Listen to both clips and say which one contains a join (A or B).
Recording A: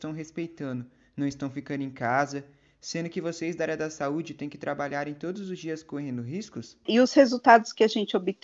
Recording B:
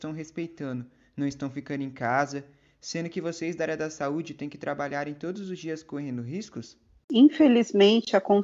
A